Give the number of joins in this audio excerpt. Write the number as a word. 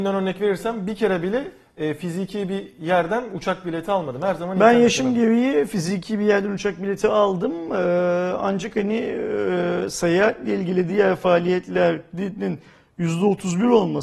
zero